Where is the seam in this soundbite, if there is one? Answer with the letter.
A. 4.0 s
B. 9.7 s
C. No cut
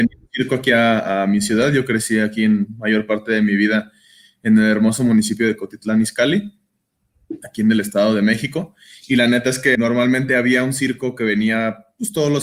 B